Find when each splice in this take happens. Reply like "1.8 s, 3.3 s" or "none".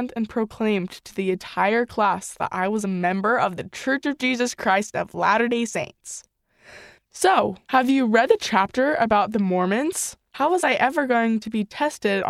7.6 s, 10.3 s